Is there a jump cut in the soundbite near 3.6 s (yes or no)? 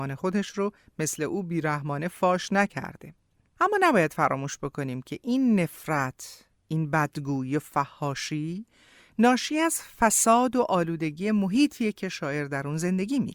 yes